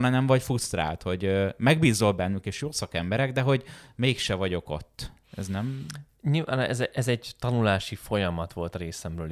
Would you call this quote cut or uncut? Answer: uncut